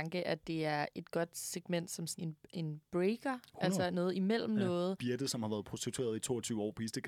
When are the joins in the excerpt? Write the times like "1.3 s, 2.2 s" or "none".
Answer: 2.2 s, 5.0 s